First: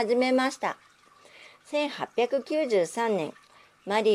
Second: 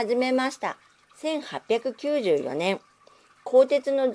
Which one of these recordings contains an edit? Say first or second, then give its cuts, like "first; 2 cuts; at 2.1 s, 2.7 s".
second; 1 cut; at 1.0 s